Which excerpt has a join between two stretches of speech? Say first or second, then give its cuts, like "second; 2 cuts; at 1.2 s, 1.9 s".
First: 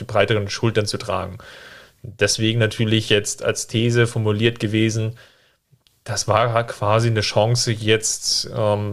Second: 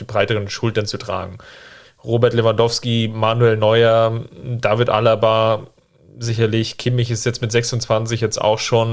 second; 1 cut; at 1.8 s